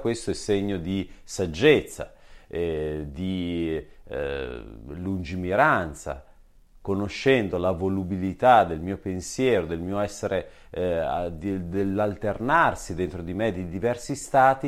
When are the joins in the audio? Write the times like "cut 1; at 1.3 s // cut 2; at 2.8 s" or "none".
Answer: none